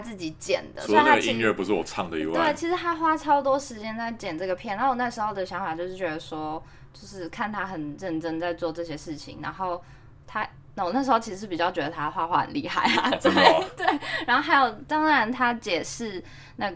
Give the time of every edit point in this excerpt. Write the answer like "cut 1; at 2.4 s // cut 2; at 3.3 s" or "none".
none